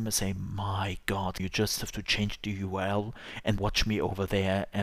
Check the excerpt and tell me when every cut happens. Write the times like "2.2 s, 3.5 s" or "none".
1.4 s, 3.6 s